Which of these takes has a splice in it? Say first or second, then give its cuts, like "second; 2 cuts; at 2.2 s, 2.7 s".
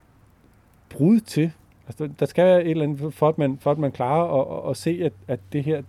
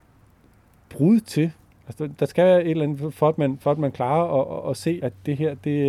second; 1 cut; at 5.0 s